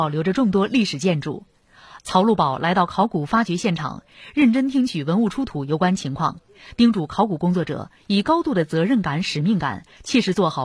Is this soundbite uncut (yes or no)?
no